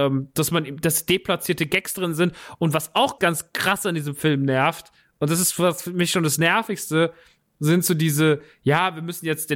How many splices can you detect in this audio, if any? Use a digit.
1